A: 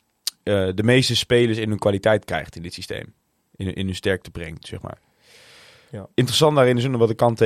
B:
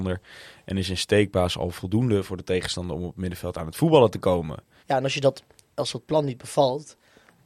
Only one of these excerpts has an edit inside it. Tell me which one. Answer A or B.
B